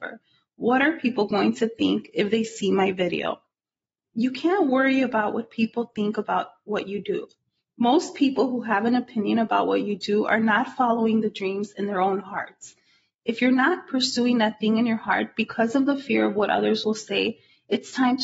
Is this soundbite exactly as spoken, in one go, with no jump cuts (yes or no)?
yes